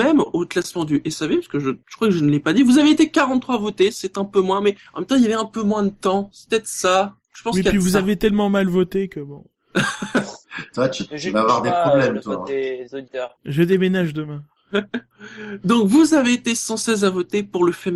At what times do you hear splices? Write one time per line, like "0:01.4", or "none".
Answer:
none